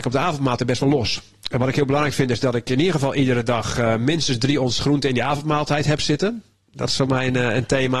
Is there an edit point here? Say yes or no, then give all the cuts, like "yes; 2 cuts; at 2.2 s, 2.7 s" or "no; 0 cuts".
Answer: no; 0 cuts